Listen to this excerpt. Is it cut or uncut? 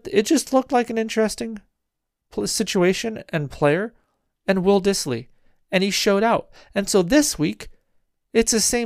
uncut